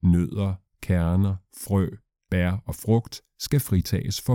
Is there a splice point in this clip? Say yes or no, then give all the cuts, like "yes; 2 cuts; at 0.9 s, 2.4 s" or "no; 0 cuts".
no; 0 cuts